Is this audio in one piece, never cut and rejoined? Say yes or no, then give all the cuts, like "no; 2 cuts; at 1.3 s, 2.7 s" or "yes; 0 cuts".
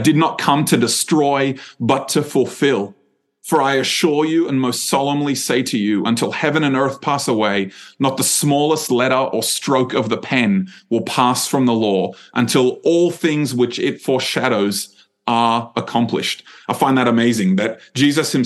yes; 0 cuts